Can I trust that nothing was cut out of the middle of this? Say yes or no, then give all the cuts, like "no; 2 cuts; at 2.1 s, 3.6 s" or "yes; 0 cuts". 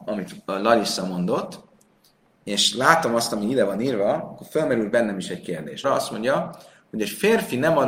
no; 1 cut; at 5.8 s